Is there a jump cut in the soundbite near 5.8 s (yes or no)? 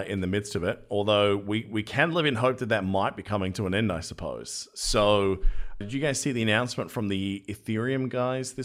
yes